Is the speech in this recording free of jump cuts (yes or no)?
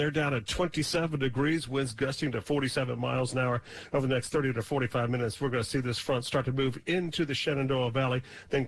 yes